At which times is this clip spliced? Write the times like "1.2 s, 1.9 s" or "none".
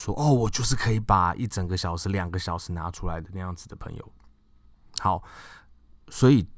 none

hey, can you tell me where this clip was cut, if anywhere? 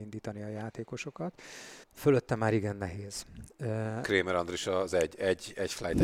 1.8 s, 4.0 s

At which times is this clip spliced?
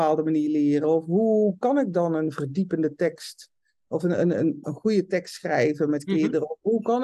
4.6 s

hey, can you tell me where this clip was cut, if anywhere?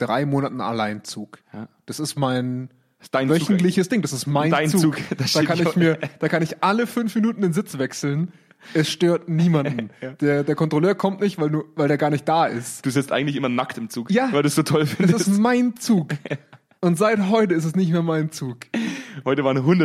none

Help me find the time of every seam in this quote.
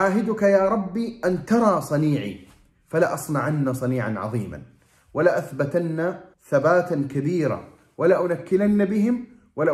6.3 s

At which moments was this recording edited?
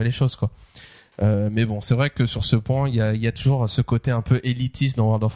none

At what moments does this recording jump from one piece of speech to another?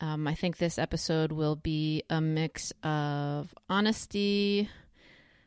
none

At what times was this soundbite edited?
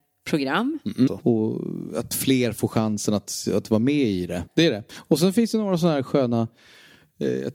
1.1 s, 4.5 s

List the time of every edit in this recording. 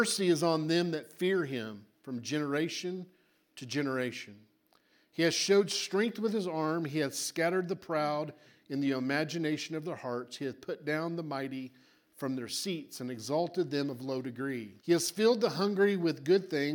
14.8 s

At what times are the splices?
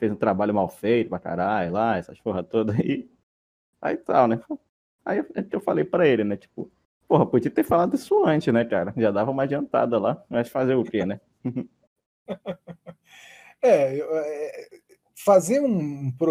none

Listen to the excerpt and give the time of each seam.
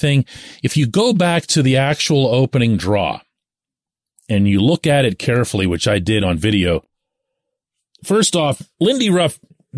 none

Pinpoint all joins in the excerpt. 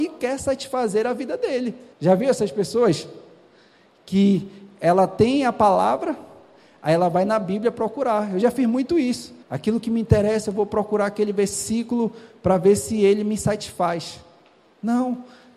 1.9 s, 9.4 s

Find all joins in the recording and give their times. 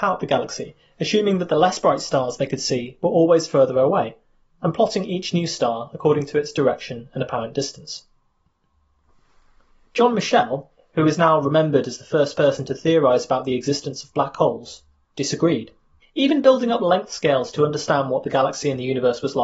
16.0 s

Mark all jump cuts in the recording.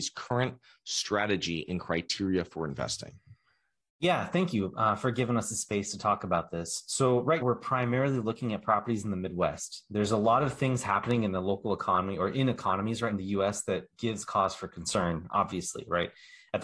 7.4 s, 13.1 s

